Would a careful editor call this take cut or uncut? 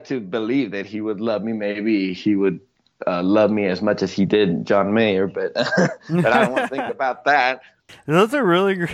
cut